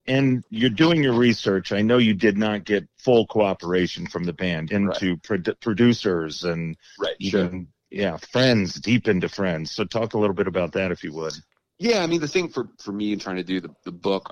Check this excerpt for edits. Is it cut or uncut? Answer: cut